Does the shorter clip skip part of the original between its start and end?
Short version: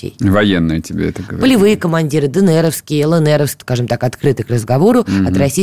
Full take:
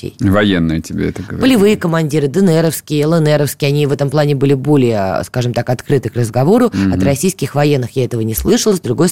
yes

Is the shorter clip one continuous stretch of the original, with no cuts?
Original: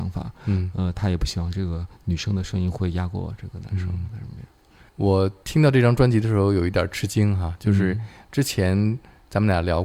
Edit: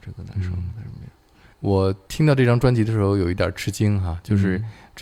yes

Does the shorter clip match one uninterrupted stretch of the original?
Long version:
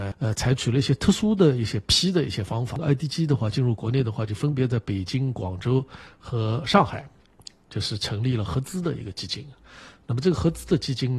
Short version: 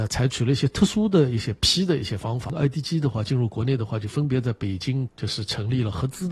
no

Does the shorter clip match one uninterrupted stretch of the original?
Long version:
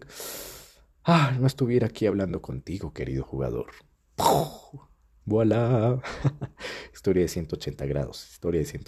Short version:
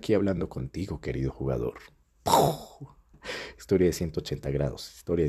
no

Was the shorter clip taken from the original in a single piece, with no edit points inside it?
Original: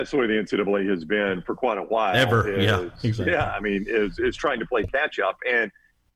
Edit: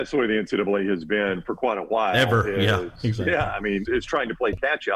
no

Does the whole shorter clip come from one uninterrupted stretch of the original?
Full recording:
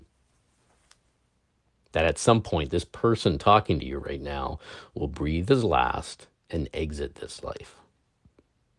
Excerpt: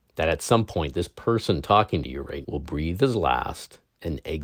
no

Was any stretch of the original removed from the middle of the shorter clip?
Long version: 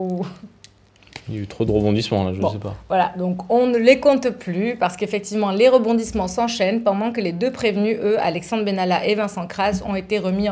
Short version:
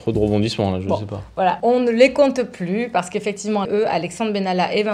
yes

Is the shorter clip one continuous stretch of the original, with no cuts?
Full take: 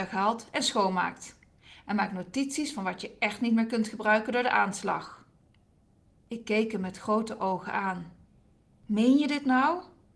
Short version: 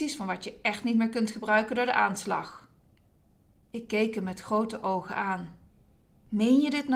yes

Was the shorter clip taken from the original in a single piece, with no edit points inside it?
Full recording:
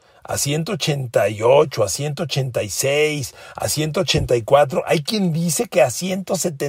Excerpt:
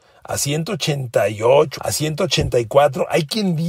no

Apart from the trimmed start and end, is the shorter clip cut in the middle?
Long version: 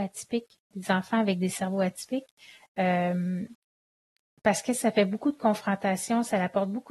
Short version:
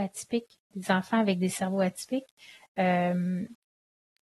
no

